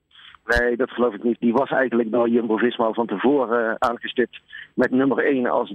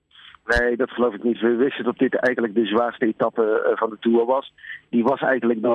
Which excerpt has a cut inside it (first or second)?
first